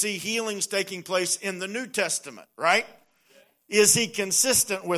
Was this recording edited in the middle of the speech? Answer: no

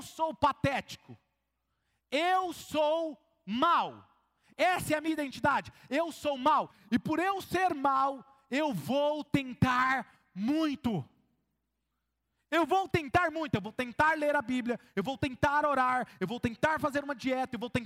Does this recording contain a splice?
no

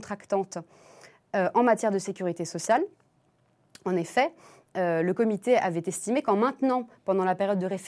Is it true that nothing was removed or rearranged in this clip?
yes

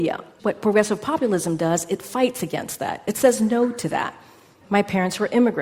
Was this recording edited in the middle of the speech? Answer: yes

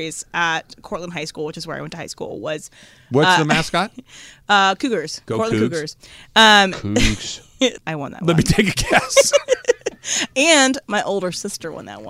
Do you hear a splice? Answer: yes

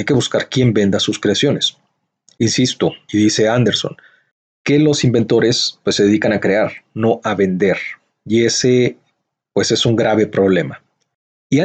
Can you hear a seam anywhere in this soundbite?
yes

